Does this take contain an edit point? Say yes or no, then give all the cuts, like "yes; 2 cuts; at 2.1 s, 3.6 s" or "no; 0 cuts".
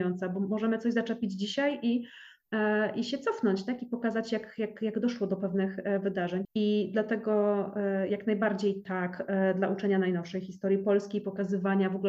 yes; 1 cut; at 6.4 s